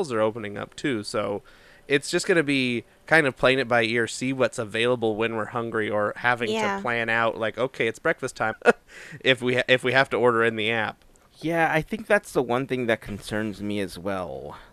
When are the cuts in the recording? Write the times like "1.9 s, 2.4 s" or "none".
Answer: 8.5 s